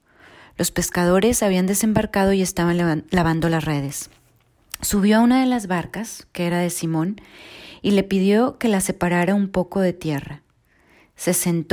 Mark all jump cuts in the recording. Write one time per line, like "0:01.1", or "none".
none